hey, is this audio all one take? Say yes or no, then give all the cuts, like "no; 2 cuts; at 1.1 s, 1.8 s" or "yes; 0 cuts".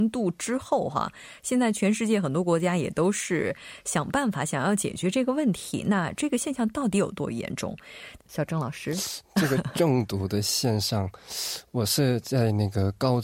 no; 1 cut; at 8.2 s